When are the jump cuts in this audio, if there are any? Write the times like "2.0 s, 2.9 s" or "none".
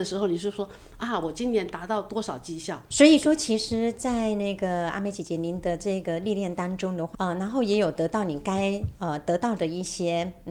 2.9 s, 7.1 s

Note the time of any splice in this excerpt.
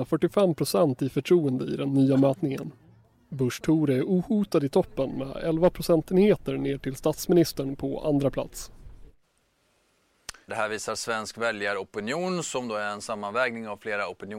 10.5 s

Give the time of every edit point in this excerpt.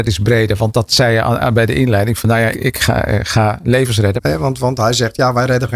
2.5 s, 4.2 s

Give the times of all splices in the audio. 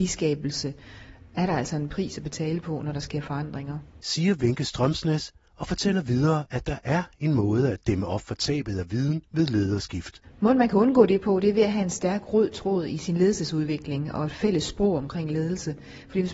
none

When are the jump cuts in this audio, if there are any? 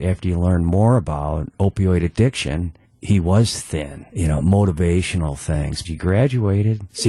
4.1 s, 5.8 s

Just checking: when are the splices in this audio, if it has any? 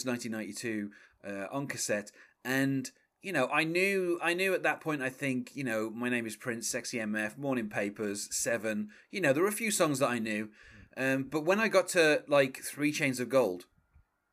none

